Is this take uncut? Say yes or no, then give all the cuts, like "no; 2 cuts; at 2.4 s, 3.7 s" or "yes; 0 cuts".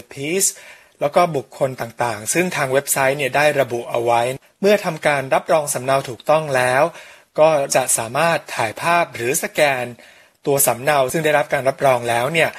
yes; 0 cuts